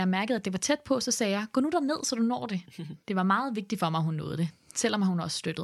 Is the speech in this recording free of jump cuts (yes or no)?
no